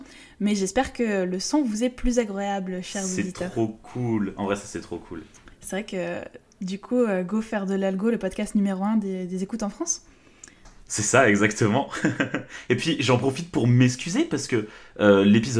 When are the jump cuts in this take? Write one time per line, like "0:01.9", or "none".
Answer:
none